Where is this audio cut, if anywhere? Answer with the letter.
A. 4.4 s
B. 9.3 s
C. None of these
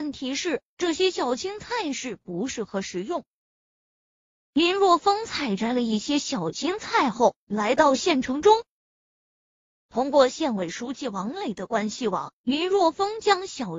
C